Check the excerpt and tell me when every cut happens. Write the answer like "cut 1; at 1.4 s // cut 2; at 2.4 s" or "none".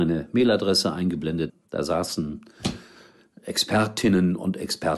cut 1; at 1.5 s